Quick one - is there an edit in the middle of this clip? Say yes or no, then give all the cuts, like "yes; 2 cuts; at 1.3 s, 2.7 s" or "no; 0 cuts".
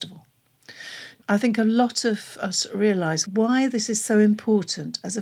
yes; 1 cut; at 1.2 s